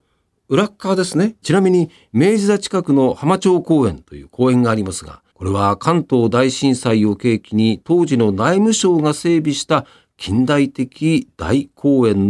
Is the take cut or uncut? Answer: cut